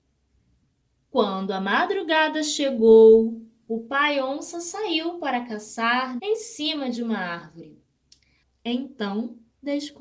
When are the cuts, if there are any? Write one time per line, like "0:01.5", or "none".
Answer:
0:06.2
0:08.4